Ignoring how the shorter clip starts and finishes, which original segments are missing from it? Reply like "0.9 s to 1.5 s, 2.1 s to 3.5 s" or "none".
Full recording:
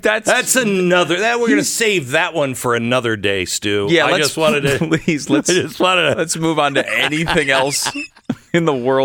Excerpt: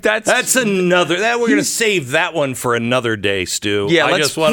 none